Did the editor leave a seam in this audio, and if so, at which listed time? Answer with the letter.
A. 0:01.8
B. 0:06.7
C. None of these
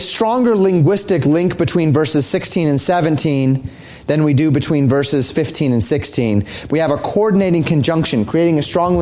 B